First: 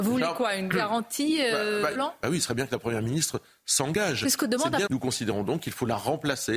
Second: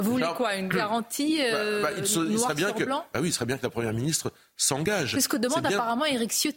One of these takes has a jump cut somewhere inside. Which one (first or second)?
first